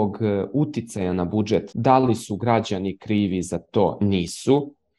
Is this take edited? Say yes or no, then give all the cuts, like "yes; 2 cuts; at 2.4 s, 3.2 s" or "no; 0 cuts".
yes; 1 cut; at 1.7 s